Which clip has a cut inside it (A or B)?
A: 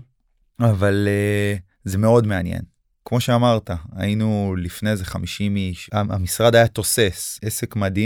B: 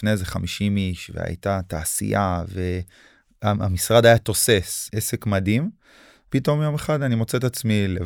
A